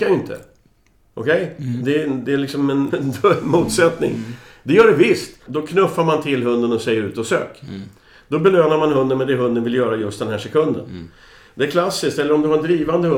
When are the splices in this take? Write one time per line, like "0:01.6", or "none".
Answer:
0:02.9
0:05.5